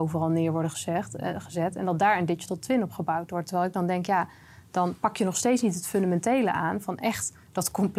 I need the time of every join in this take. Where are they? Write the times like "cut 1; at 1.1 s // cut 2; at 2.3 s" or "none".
none

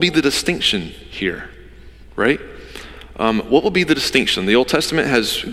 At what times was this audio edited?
none

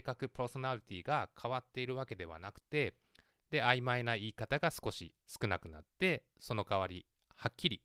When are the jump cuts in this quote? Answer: cut 1; at 3.3 s // cut 2; at 5.2 s

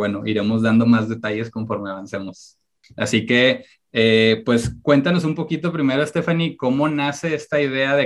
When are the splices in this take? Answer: cut 1; at 2.8 s

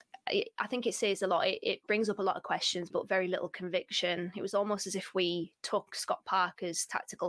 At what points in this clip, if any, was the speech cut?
cut 1; at 2.9 s

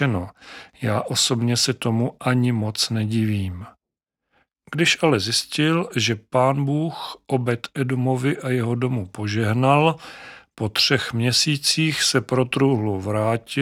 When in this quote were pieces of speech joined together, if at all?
cut 1; at 4.5 s

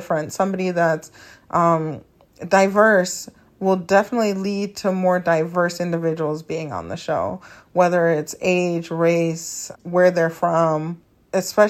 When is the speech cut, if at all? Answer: cut 1; at 9.7 s

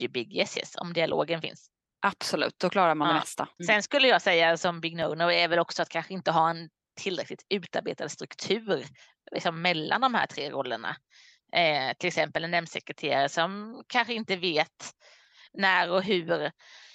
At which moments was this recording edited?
cut 1; at 3.6 s

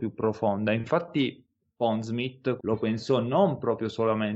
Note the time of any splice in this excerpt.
cut 1; at 2.6 s

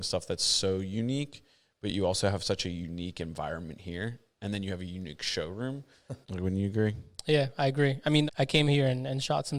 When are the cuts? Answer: cut 1; at 6.2 s // cut 2; at 8.3 s

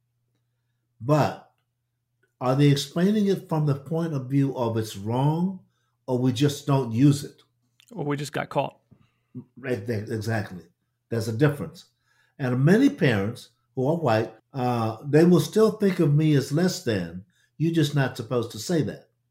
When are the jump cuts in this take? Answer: cut 1; at 14.4 s

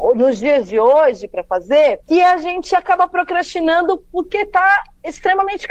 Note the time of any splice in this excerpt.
cut 1; at 2.0 s

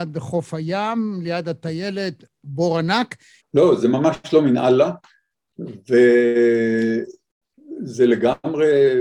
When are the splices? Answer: cut 1; at 3.4 s

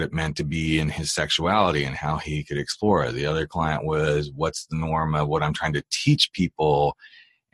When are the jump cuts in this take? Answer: none

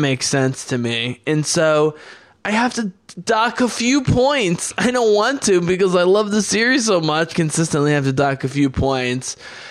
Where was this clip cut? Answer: cut 1; at 7.3 s

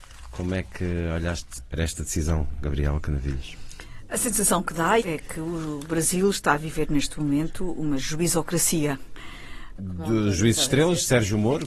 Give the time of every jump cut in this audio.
cut 1; at 5.0 s // cut 2; at 9.8 s

